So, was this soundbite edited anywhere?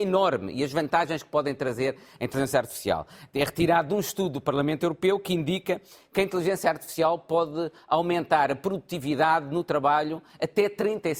no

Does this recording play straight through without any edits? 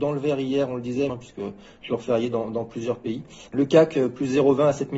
no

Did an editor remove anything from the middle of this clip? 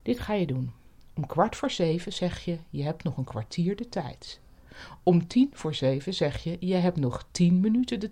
no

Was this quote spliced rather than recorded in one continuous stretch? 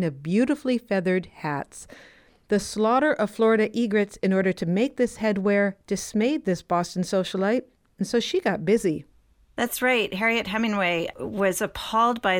no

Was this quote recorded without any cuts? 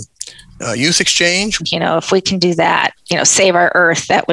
no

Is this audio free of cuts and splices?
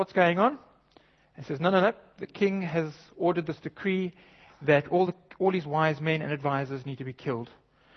yes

